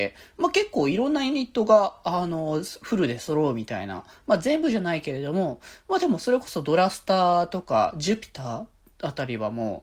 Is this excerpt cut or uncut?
uncut